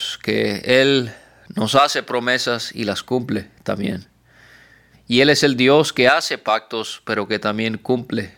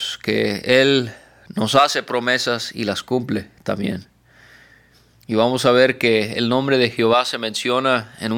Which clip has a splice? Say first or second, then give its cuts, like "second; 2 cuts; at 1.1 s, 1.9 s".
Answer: first; 1 cut; at 4.9 s